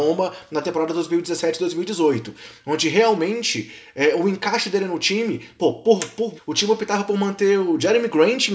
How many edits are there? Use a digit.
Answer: 1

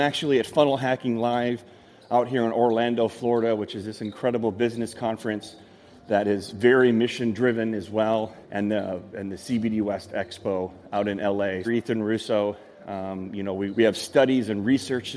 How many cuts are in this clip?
3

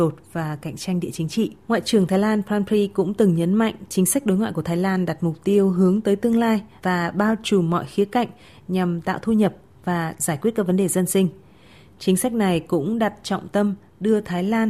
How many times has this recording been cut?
1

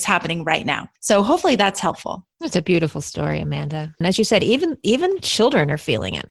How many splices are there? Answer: 1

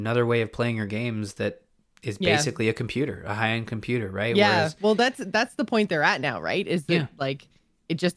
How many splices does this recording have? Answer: 0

